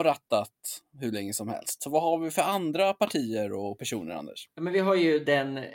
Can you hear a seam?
no; 0 cuts

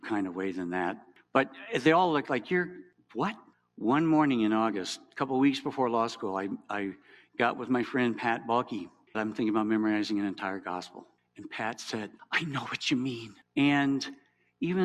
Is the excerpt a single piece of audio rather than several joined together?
no; 2 cuts; at 9.1 s, 13.5 s

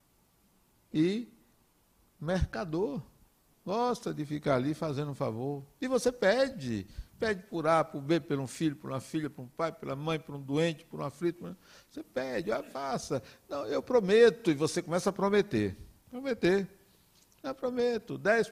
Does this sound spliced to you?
no; 0 cuts

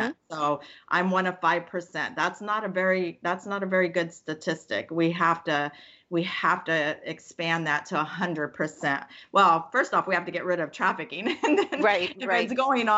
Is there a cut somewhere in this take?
no; 0 cuts

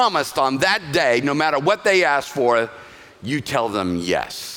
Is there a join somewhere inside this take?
no; 0 cuts

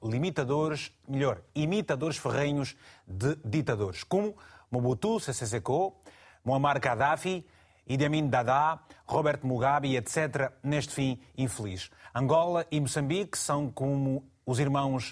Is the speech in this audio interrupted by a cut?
no; 0 cuts

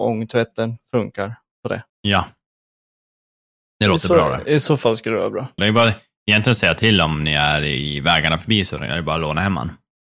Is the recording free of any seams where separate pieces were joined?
no; 2 cuts; at 1.9 s, 5.6 s

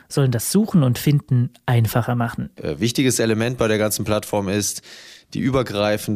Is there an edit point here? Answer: yes; 1 cut; at 2.6 s

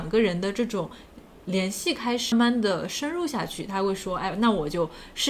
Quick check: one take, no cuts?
no; 1 cut; at 2.3 s

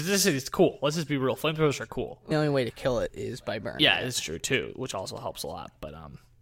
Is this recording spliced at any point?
yes; 1 cut; at 2.3 s

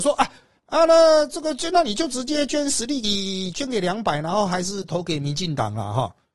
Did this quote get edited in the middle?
no; 0 cuts

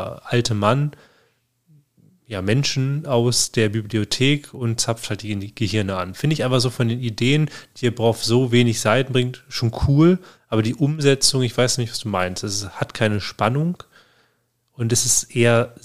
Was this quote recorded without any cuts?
yes; 0 cuts

